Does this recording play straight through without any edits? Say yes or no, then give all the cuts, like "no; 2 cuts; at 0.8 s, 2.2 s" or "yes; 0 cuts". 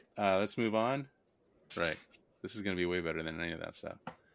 no; 1 cut; at 1.7 s